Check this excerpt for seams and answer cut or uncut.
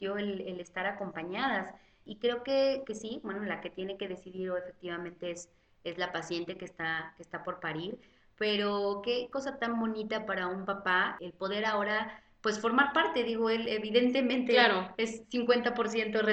uncut